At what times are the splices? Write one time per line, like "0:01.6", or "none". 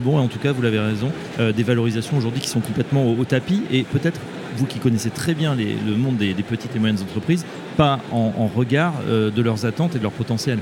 none